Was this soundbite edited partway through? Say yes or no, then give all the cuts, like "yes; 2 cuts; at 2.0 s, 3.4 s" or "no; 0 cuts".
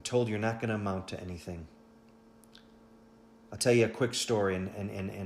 no; 0 cuts